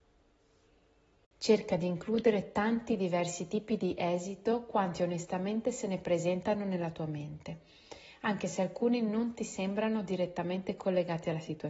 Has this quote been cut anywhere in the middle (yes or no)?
no